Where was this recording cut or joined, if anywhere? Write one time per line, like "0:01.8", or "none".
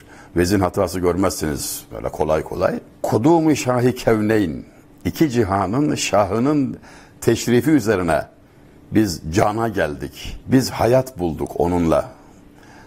none